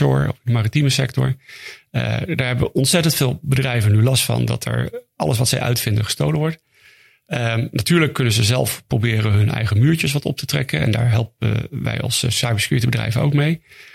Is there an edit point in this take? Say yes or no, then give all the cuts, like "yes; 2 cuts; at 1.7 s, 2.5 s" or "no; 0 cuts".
no; 0 cuts